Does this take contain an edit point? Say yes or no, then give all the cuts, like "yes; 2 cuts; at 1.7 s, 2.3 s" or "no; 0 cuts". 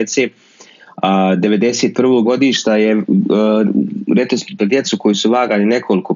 yes; 2 cuts; at 2.2 s, 4.6 s